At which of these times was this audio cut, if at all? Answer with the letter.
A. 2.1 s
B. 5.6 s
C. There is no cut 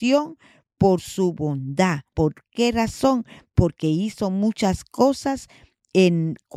A